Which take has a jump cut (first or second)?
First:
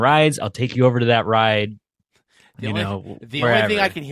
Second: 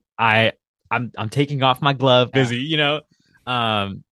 second